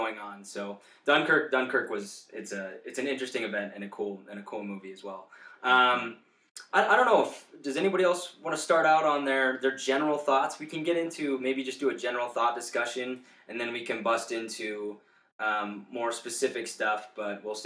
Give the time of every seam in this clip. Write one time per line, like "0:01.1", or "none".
none